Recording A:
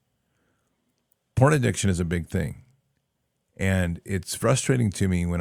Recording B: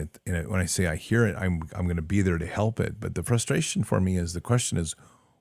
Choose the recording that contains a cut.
A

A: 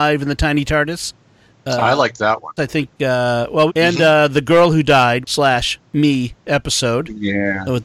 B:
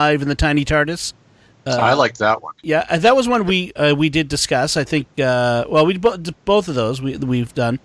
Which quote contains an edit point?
A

